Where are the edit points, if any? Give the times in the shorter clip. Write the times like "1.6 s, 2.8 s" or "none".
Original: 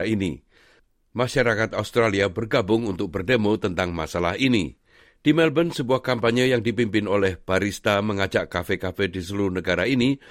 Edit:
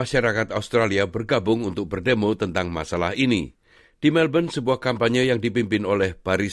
none